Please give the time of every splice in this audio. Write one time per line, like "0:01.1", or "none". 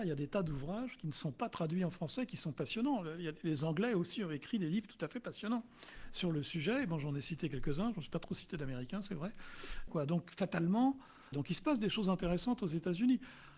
0:09.9
0:11.3